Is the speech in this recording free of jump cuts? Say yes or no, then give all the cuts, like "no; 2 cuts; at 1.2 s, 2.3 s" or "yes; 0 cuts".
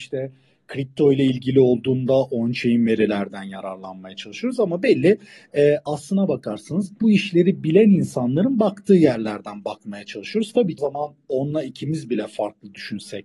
no; 1 cut; at 10.8 s